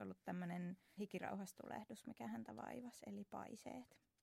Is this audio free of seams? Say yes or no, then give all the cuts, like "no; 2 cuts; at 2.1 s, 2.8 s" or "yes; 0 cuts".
no; 1 cut; at 1.0 s